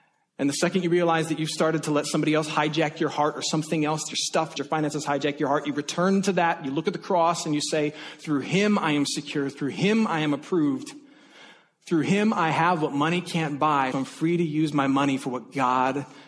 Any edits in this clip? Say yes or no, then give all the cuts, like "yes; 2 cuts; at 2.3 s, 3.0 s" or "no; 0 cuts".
yes; 2 cuts; at 4.6 s, 13.9 s